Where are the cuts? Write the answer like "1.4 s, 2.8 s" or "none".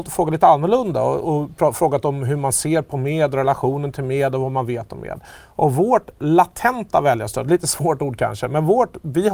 none